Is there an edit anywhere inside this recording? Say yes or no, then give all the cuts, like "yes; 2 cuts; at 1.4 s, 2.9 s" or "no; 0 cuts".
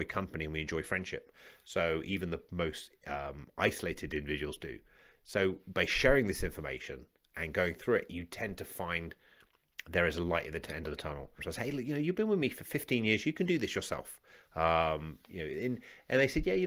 yes; 1 cut; at 11.4 s